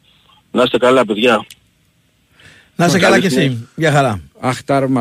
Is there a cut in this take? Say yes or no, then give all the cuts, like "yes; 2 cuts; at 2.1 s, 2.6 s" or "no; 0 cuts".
no; 0 cuts